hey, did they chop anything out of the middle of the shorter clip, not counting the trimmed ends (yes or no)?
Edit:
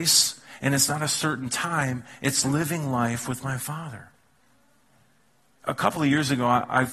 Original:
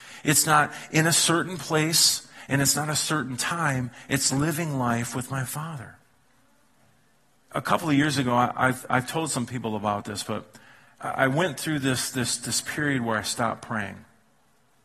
no